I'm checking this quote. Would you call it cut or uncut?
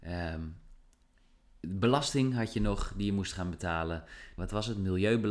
cut